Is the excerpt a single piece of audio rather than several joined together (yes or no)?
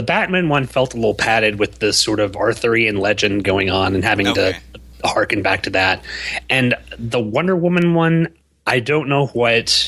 yes